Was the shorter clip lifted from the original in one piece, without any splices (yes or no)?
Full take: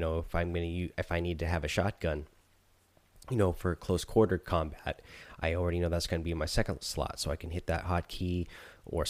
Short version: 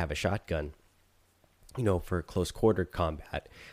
yes